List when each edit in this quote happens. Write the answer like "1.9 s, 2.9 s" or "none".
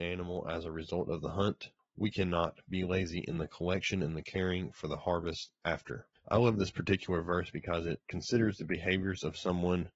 6.2 s